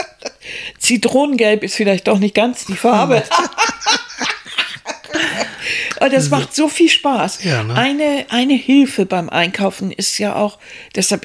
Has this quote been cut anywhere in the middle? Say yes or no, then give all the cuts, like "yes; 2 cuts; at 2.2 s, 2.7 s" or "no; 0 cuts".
no; 0 cuts